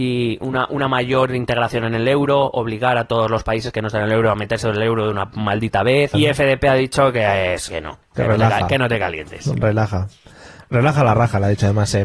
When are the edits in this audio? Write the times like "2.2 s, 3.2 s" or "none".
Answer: 6.1 s, 7.7 s